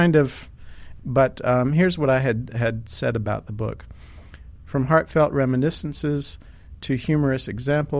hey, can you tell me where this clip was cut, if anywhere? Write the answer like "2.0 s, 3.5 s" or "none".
1.0 s, 4.6 s